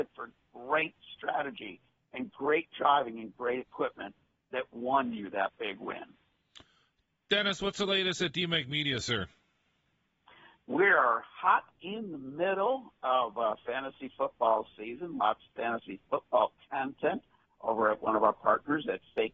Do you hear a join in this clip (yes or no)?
no